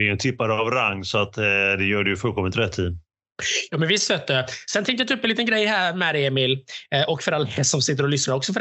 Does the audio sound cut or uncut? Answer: uncut